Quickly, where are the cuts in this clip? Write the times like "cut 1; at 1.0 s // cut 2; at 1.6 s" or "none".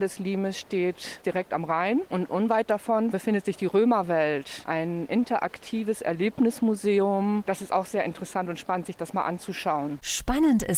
cut 1; at 7.4 s